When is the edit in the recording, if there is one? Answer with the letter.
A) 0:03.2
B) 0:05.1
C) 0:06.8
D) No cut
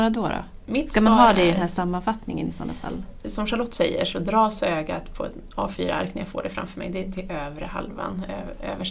A